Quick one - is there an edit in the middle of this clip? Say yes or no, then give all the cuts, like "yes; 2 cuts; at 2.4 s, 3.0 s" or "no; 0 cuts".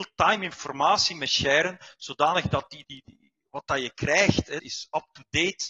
yes; 2 cuts; at 2.8 s, 4.6 s